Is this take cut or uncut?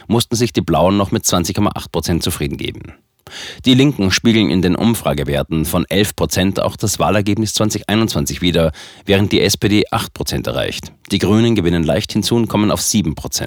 uncut